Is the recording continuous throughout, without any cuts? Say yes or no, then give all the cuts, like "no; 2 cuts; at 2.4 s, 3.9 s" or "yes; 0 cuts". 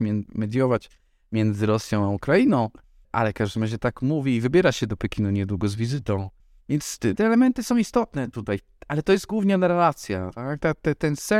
no; 1 cut; at 7.1 s